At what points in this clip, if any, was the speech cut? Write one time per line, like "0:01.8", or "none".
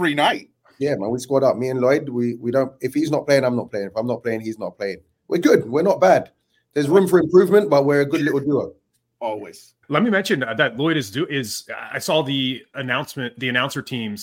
0:09.8
0:12.7